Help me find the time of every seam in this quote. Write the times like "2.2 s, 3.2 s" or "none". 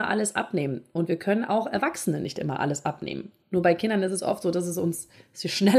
none